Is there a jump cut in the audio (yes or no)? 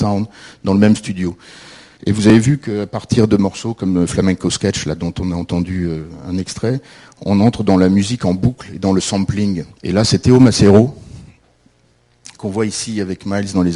yes